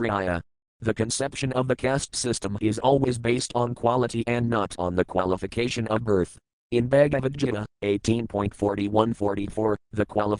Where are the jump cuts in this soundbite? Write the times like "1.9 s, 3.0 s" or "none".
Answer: 6.6 s